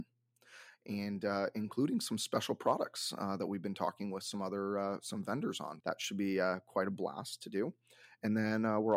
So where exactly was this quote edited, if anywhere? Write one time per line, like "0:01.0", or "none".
0:05.8